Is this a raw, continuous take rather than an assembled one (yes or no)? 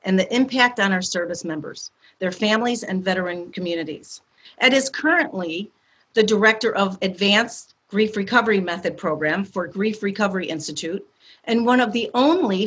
no